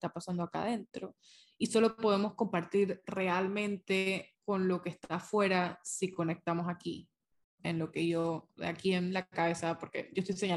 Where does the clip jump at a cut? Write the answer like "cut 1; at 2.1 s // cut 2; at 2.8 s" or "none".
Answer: none